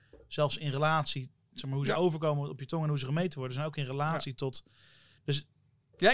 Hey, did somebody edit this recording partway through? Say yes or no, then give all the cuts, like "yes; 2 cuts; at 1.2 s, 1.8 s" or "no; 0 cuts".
no; 0 cuts